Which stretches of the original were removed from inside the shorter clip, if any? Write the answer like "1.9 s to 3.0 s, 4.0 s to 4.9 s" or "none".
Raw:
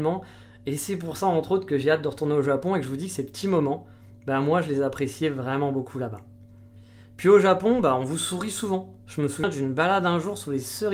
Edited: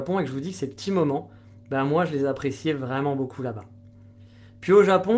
none